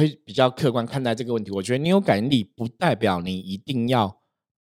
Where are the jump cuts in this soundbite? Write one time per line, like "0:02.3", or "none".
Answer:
none